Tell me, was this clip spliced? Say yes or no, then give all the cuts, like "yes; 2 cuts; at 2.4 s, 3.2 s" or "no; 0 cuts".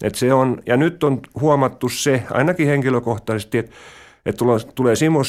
no; 0 cuts